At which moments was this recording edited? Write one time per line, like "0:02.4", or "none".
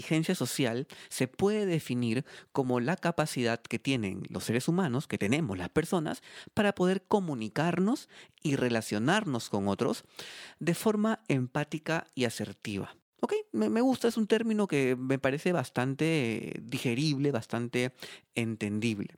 none